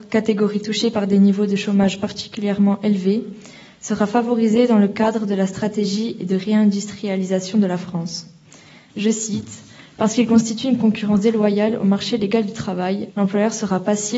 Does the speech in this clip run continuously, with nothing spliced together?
no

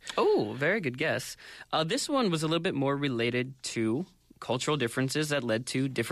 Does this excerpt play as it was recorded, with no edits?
no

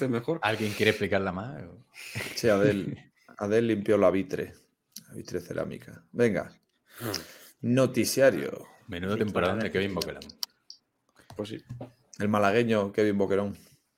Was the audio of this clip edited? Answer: no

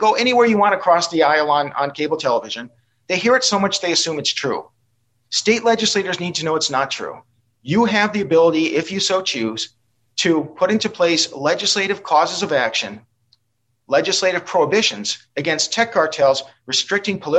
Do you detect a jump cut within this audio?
no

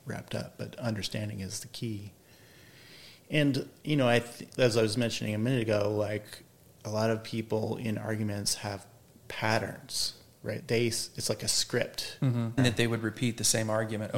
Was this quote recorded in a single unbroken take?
no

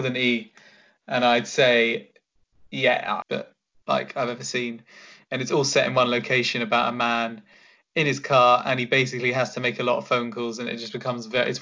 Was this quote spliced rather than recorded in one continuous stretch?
yes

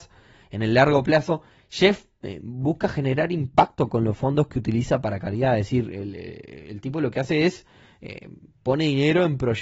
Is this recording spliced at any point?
no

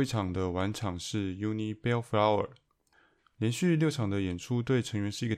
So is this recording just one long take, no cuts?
yes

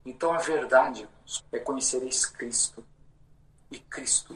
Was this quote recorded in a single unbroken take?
no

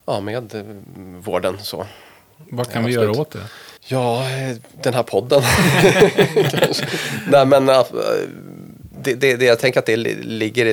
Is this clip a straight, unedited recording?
no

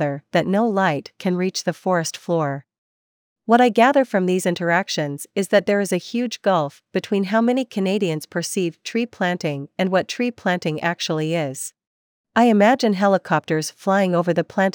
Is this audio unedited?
no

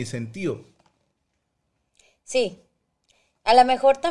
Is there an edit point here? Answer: no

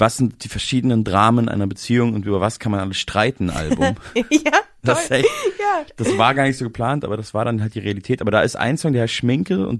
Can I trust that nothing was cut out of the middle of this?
yes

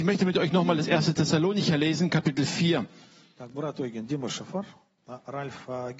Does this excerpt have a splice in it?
no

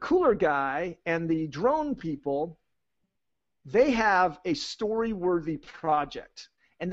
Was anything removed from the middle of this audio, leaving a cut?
no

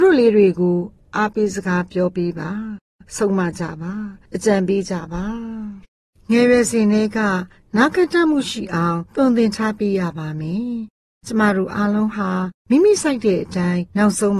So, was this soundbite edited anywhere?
no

